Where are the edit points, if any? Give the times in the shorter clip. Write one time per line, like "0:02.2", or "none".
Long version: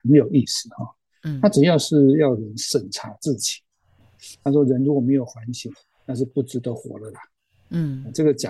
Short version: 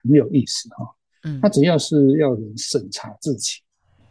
none